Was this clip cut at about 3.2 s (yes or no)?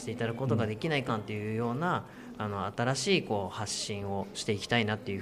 no